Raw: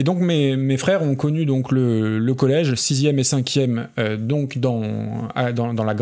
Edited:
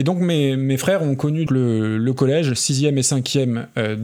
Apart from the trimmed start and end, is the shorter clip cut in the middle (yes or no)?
yes